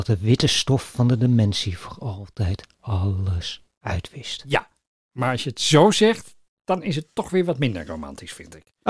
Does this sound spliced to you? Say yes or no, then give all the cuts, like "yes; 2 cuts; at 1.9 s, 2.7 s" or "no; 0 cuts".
no; 0 cuts